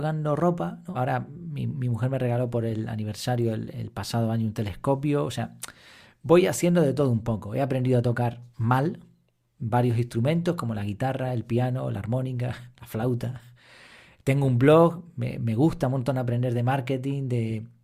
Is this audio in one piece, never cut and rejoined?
no; 1 cut; at 0.9 s

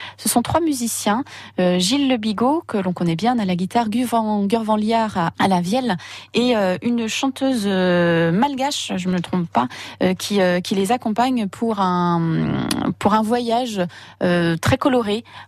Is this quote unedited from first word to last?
no; 1 cut; at 5.3 s

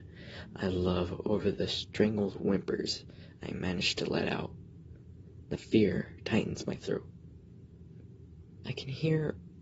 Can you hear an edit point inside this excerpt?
yes; 1 cut; at 8.6 s

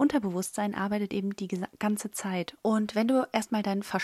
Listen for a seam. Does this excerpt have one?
yes; 1 cut; at 2.6 s

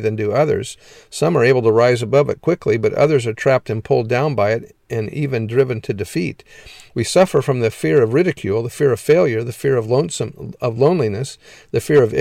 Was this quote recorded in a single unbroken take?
yes; 0 cuts

